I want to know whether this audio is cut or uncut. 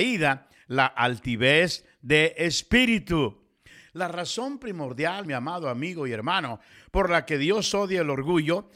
uncut